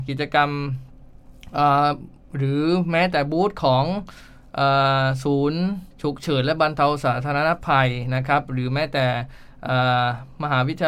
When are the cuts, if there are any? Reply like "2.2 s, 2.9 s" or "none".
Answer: 5.9 s